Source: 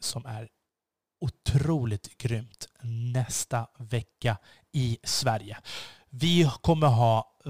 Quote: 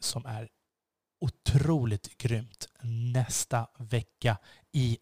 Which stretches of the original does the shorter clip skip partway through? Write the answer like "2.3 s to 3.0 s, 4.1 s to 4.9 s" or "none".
none

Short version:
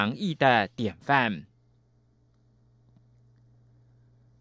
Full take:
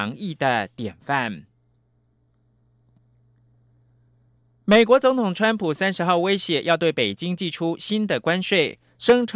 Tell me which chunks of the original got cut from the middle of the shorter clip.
none

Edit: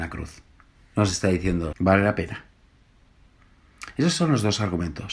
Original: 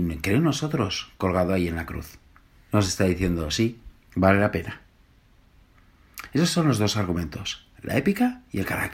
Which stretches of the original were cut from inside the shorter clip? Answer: 3.5 s to 4.1 s

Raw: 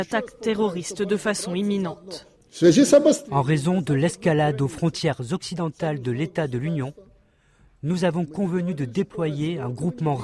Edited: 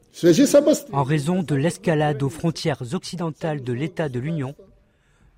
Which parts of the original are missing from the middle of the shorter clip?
none

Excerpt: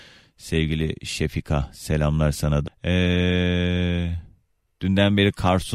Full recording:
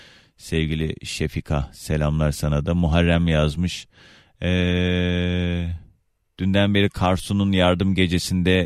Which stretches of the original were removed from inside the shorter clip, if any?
2.7 s to 4.2 s

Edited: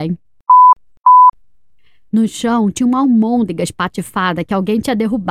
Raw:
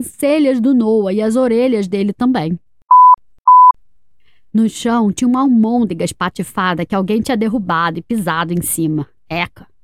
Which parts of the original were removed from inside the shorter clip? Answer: none

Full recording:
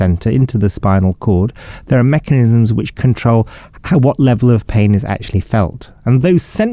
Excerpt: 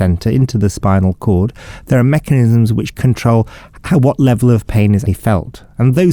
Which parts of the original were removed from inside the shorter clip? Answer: 5.1 s to 5.3 s

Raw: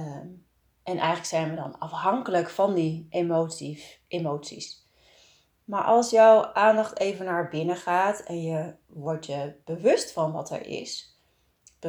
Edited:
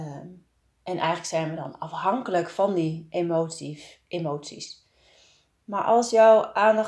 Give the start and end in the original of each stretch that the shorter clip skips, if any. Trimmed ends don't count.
none

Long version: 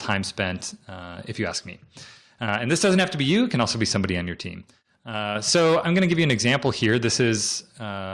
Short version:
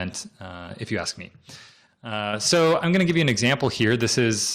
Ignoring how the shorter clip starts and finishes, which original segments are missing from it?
2.3 s to 4.9 s

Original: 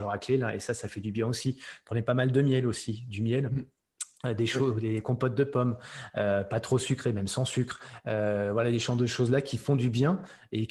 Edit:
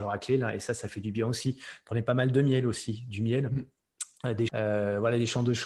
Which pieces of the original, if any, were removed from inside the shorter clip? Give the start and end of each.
4.5 s to 8.0 s

